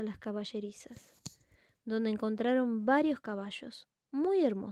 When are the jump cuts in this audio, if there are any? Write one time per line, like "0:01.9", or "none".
none